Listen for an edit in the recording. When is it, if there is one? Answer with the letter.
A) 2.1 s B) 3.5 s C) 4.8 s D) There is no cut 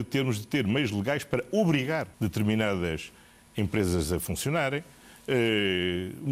A